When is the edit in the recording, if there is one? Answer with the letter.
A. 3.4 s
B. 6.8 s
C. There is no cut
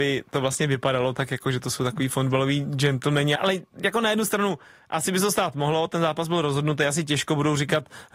A